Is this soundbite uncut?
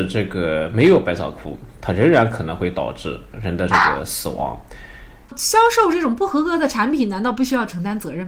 no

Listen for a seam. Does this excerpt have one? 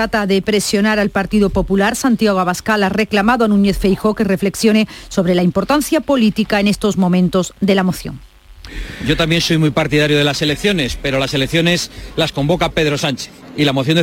no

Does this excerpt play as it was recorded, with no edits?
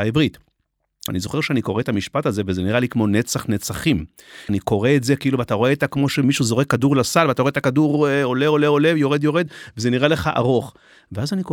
no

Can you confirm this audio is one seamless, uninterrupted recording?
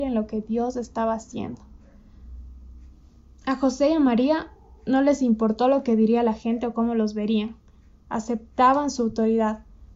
no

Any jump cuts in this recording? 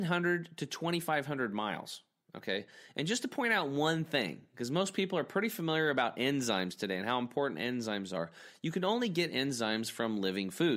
no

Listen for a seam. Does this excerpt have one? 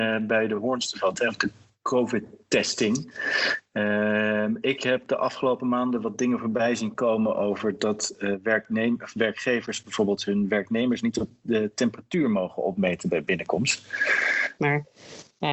yes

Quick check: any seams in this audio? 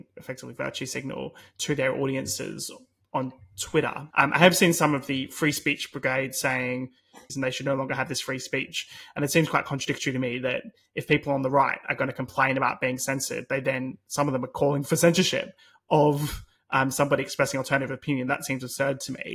yes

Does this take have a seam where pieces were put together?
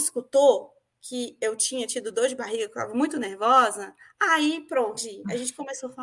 yes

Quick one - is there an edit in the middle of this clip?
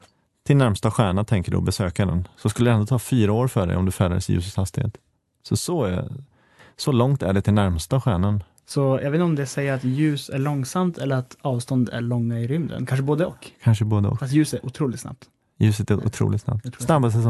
no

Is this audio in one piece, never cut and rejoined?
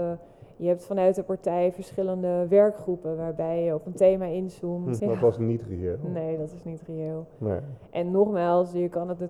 no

